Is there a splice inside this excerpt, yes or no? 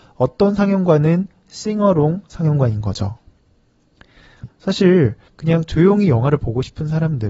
yes